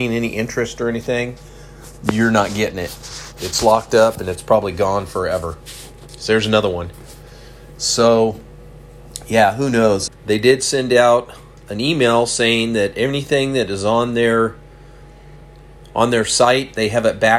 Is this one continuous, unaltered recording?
no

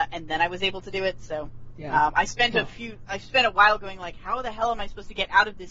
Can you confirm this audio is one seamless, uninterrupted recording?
yes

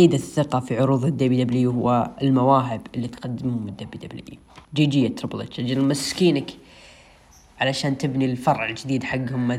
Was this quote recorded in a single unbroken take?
no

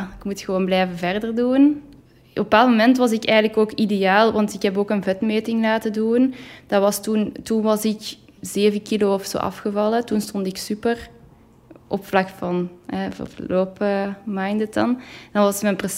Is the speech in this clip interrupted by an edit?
yes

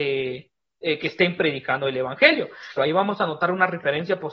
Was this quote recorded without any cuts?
no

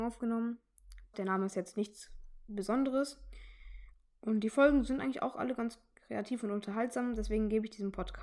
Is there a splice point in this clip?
yes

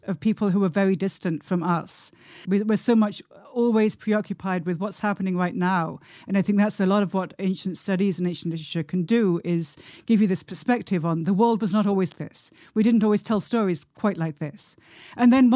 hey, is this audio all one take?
no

